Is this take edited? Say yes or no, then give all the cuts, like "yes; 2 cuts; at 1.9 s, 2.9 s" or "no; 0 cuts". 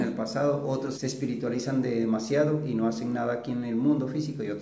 yes; 1 cut; at 1.0 s